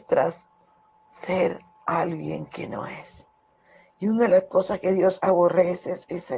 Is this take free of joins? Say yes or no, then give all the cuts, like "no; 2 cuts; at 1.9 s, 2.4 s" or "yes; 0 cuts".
yes; 0 cuts